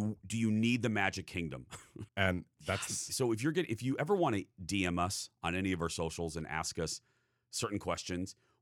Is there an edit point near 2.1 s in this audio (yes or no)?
yes